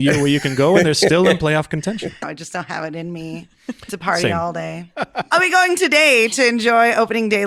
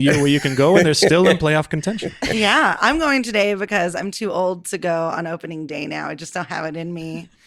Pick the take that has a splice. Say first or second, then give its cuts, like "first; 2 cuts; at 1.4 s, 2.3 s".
first; 1 cut; at 2.2 s